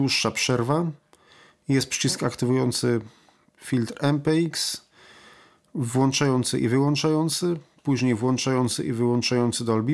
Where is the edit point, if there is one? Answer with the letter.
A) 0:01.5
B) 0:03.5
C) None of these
C